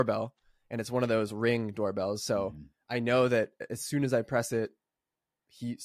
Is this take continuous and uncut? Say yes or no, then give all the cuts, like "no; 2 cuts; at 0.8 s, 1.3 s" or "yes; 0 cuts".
yes; 0 cuts